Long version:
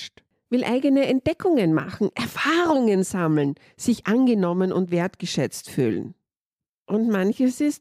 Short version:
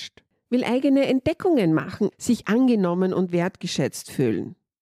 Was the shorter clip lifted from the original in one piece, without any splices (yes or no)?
no